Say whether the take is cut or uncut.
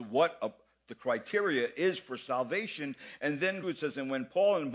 cut